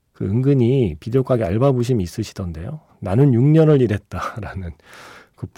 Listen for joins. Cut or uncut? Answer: cut